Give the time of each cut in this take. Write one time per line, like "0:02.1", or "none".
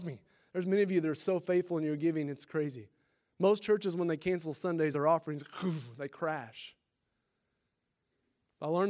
none